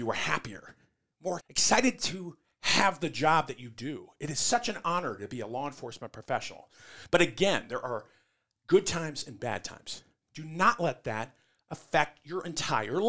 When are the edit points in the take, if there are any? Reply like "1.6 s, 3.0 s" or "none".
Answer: 1.4 s

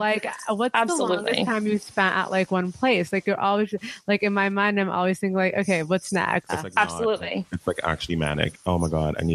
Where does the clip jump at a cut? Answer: 6.5 s

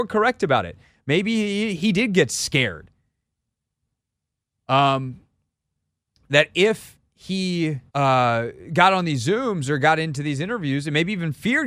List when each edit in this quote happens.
4.6 s, 7.9 s

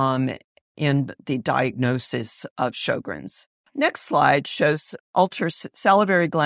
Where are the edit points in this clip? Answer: 3.7 s, 5.0 s

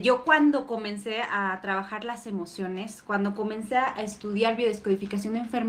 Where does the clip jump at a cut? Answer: none

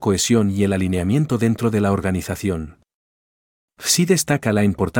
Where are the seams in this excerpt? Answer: 3.7 s

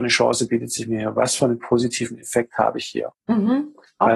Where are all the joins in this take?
3.1 s

